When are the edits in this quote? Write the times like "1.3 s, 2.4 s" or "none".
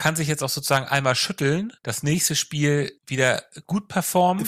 1.8 s, 3.0 s